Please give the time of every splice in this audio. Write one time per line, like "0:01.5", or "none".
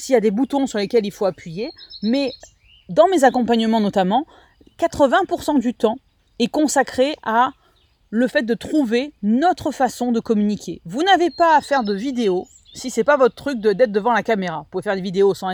none